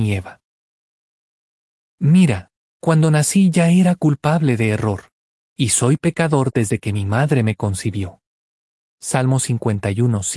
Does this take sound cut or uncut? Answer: uncut